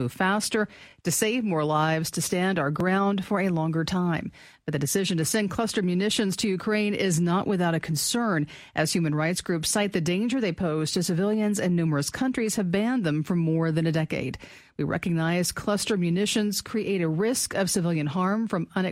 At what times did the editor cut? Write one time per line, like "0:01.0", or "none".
none